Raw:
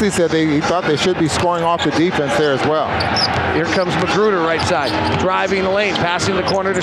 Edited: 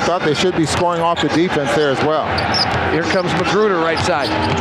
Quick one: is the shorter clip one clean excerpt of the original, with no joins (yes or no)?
yes